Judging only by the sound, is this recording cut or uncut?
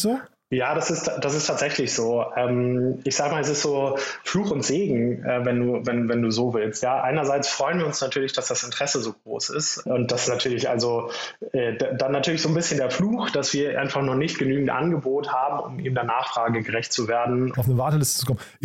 cut